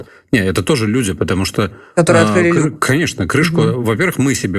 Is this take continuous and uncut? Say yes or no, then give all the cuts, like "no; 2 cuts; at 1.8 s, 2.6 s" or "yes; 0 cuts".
yes; 0 cuts